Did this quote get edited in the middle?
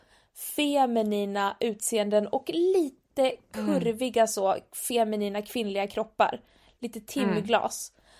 no; 0 cuts

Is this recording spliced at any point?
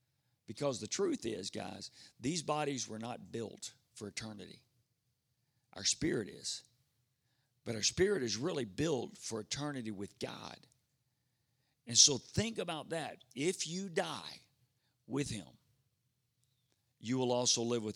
no; 0 cuts

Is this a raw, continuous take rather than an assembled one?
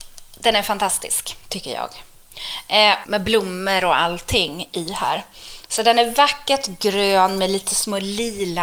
no; 1 cut; at 3.0 s

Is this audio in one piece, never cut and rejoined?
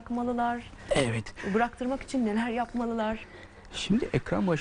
yes; 0 cuts

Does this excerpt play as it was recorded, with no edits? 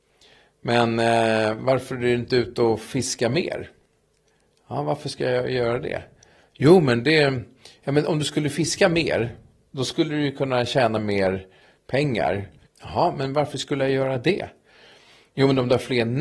no; 1 cut; at 12.7 s

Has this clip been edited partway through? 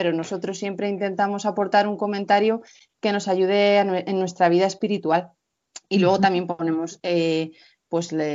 no; 0 cuts

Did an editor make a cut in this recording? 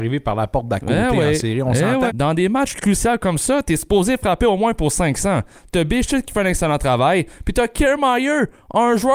yes; 1 cut; at 2.1 s

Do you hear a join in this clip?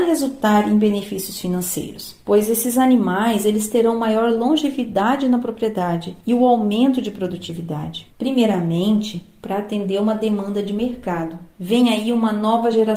yes; 1 cut; at 8.1 s

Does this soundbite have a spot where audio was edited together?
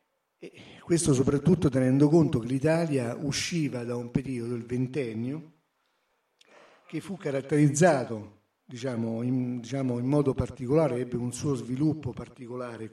no; 0 cuts

